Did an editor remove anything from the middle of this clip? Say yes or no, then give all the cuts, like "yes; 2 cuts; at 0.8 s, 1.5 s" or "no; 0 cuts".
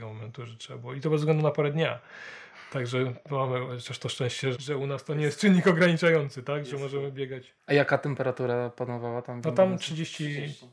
yes; 2 cuts; at 4.5 s, 7.6 s